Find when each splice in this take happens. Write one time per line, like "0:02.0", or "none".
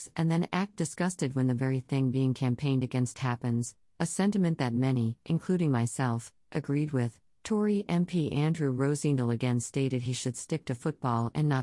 none